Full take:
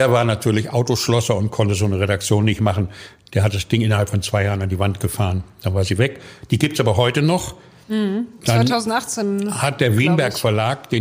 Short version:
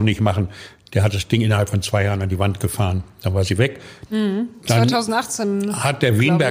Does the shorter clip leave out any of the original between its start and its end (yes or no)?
yes